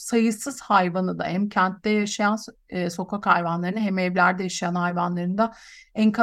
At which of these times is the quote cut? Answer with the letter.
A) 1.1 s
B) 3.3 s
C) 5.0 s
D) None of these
D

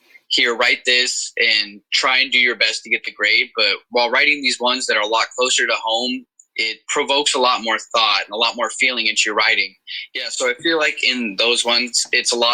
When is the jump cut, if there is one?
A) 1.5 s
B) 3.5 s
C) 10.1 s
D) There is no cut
C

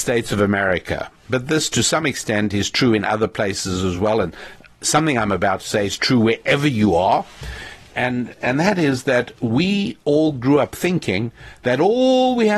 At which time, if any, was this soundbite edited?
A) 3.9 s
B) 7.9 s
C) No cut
C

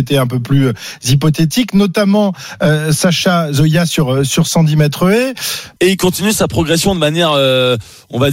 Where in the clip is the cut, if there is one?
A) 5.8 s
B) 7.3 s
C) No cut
A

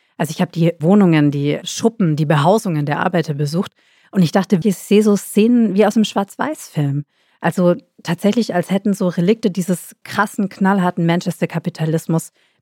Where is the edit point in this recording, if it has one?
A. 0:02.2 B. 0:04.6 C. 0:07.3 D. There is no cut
B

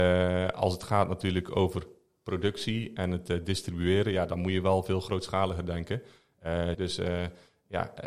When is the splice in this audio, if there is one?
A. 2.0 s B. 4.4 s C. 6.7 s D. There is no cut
C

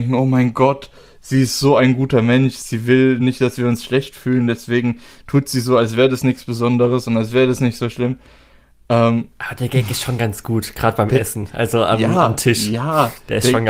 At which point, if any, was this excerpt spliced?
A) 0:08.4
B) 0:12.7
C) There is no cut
C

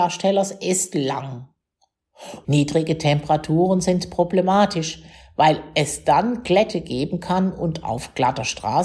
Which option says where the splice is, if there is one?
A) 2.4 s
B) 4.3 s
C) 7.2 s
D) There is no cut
A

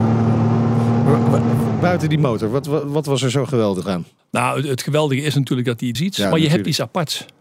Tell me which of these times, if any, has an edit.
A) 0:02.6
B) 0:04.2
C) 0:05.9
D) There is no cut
C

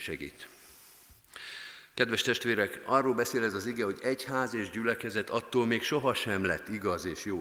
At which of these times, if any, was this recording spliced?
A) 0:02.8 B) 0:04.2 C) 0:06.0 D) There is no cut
D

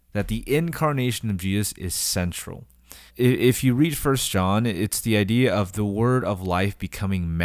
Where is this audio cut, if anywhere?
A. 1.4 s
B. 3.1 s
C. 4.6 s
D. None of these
B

